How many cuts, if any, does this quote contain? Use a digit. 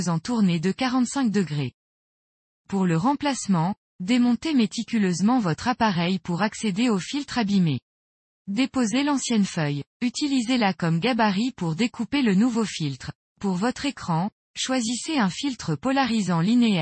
1